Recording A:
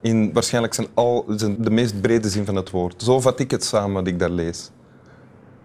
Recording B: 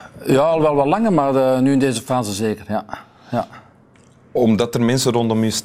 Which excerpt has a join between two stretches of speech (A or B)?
A